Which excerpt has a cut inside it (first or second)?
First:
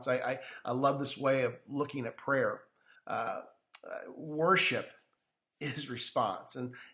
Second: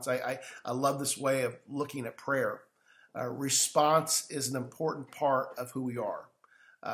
first